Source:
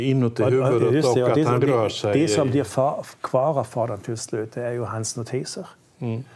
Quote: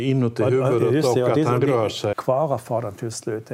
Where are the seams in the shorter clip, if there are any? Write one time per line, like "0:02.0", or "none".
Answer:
0:02.1